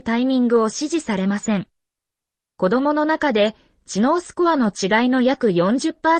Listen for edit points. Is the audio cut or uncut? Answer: cut